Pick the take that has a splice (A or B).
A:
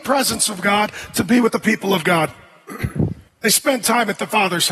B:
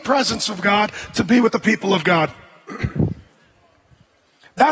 A